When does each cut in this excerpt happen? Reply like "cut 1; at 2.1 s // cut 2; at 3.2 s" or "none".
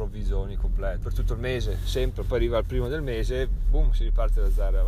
cut 1; at 1.0 s